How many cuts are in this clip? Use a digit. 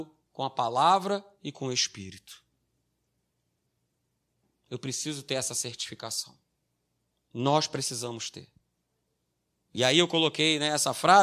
0